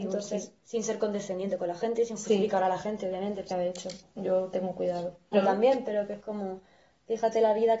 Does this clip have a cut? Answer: yes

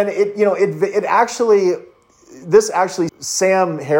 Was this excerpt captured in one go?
no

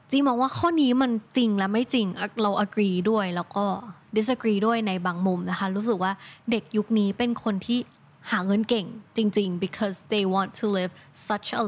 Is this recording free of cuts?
yes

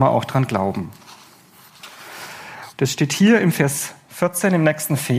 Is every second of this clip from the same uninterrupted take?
no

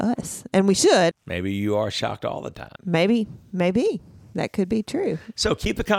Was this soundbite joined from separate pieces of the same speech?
yes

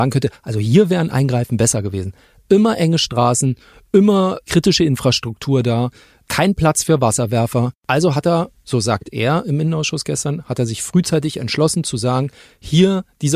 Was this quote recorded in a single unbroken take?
yes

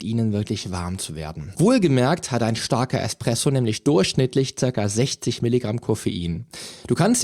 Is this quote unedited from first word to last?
no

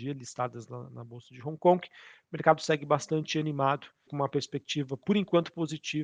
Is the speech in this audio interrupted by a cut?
yes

